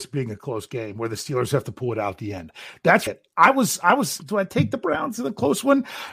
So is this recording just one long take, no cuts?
no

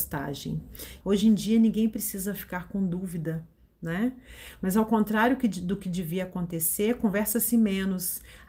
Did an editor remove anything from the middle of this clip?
yes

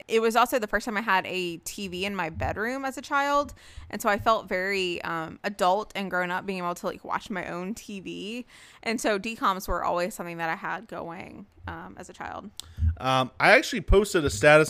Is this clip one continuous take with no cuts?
no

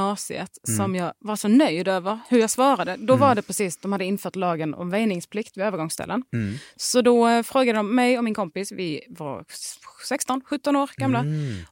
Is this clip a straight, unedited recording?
yes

